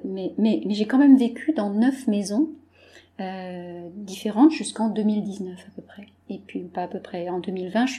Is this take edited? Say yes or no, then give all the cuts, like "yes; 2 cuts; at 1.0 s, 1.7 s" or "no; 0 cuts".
no; 0 cuts